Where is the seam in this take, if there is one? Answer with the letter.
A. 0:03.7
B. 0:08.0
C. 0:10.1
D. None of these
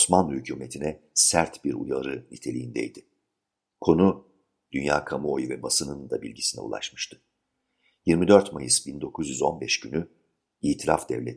A